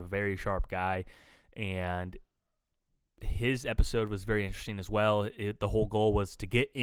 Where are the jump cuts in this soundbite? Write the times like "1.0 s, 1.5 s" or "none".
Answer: none